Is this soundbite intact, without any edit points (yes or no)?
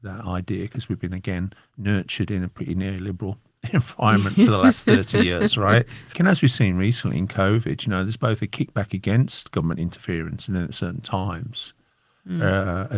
no